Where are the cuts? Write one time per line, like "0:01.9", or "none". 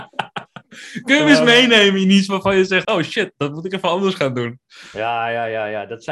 0:02.8